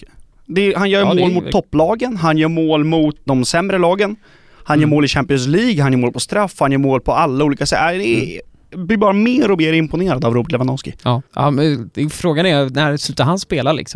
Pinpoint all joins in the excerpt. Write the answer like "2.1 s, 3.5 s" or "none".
3.3 s, 11.3 s

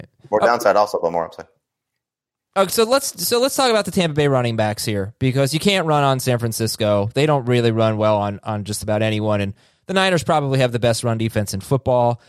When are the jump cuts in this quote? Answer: none

